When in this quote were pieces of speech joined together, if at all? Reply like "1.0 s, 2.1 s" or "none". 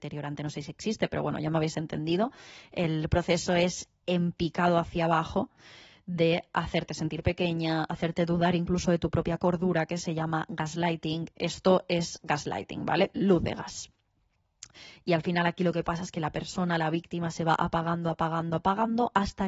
11.3 s, 18.6 s